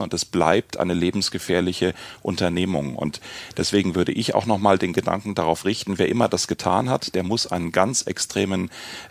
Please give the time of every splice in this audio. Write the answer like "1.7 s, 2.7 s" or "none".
none